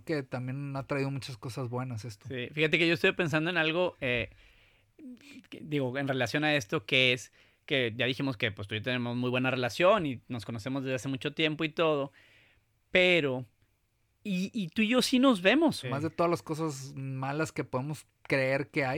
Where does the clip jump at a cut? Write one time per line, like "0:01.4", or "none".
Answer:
0:08.0
0:15.8